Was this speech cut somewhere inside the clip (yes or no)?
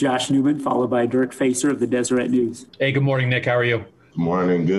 yes